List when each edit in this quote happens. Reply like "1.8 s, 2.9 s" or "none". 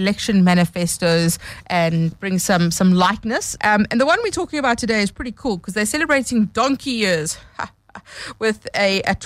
2.1 s, 3.6 s